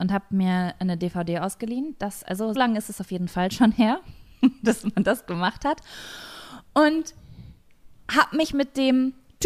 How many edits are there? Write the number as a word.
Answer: one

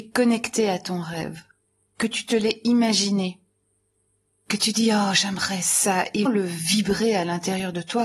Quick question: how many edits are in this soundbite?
one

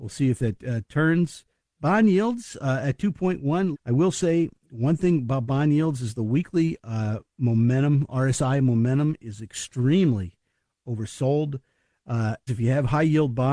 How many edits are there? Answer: two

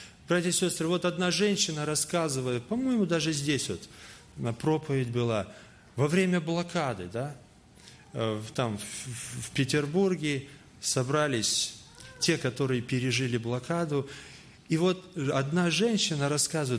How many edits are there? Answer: zero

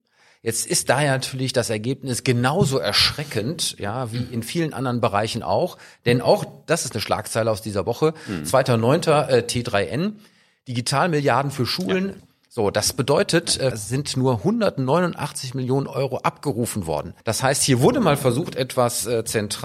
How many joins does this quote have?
three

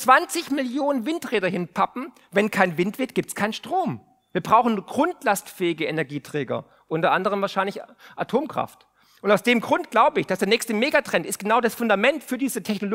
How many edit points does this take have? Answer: zero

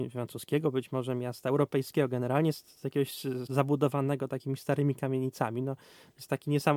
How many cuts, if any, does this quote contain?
one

